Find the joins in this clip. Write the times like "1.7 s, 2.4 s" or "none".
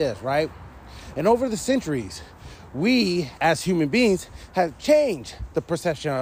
3.4 s